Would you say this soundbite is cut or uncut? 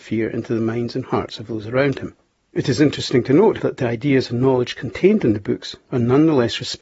cut